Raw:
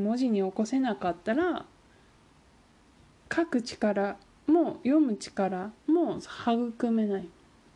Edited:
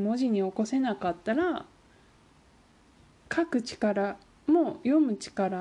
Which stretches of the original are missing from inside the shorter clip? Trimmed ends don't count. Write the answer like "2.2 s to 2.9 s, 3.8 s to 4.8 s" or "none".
none

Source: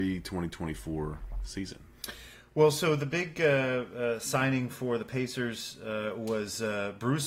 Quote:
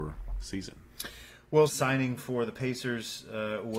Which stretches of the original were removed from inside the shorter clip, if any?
2.7 s to 4.2 s

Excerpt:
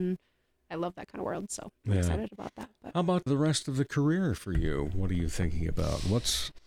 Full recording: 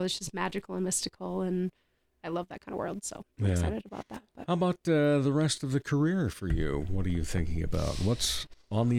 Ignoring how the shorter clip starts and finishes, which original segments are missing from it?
4.8 s to 5.2 s

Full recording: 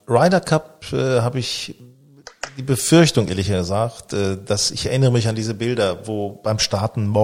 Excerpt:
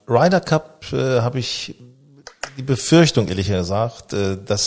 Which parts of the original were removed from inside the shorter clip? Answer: none

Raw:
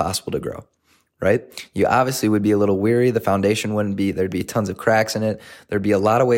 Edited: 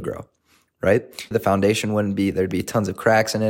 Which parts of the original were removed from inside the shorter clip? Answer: 1.7 s to 3.1 s

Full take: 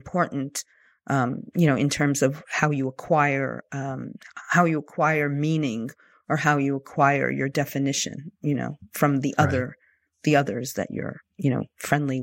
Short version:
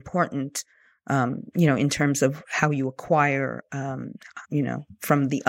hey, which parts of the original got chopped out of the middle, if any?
4.4 s to 8.4 s

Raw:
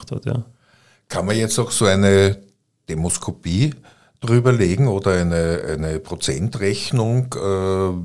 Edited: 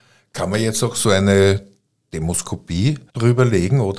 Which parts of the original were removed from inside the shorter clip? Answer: 3.8 s to 4.1 s

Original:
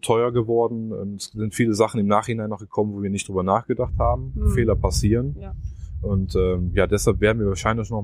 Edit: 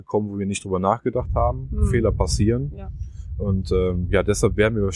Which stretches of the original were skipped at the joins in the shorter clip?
none

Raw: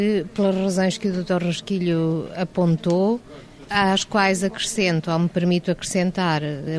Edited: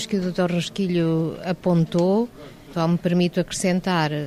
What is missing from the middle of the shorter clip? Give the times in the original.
3.6 s to 5.0 s

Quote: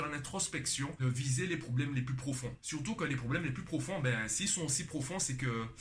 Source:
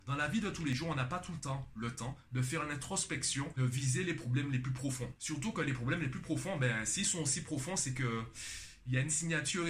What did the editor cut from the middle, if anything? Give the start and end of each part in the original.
none

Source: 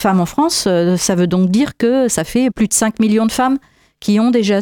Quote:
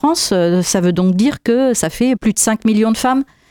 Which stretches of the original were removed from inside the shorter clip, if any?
none

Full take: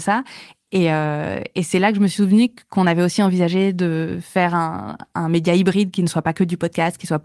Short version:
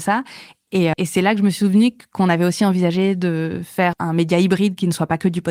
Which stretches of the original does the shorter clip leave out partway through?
0.9 s to 1.5 s, 4.5 s to 5.1 s

